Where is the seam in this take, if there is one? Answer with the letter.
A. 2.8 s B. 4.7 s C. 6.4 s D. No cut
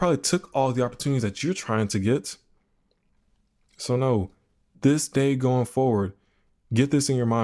B